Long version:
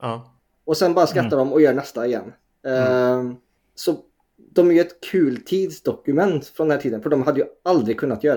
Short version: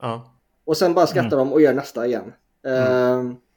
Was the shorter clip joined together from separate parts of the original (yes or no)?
no